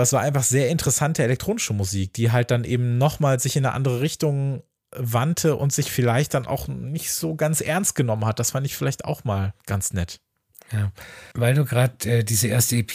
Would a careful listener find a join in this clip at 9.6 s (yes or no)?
yes